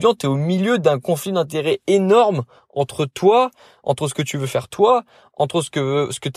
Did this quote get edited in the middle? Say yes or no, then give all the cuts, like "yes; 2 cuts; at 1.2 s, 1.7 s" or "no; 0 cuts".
no; 0 cuts